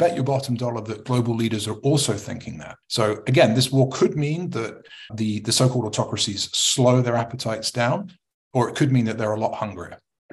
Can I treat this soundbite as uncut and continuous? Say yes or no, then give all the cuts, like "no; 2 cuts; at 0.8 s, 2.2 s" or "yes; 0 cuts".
no; 1 cut; at 2.8 s